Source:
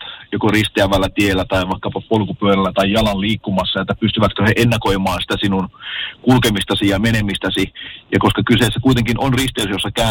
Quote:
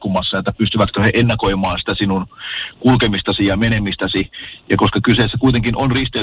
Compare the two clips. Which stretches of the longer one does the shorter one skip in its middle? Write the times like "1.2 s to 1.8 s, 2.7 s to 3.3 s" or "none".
none